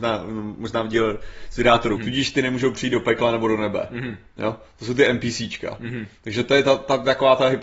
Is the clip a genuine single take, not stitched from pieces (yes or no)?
no